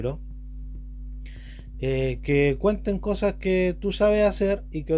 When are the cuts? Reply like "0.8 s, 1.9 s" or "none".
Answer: 1.7 s